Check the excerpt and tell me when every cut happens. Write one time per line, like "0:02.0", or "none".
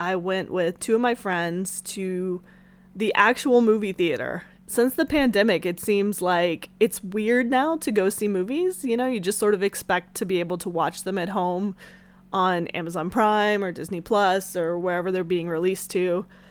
0:04.6